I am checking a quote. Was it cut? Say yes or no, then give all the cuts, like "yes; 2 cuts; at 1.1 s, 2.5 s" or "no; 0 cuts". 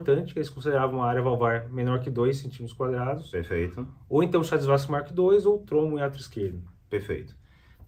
no; 0 cuts